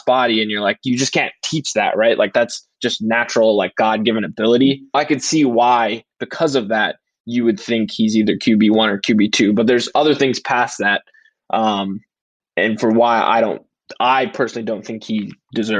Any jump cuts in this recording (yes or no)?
yes